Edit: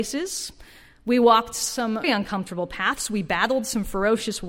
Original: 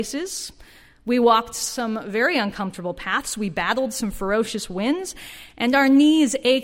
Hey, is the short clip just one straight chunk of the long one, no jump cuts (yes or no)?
no